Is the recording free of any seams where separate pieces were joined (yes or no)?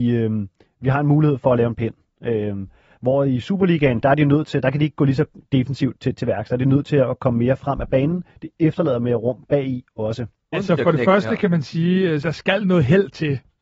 no